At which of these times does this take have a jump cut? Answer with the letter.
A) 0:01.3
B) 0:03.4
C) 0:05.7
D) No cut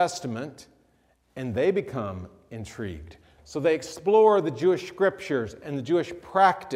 B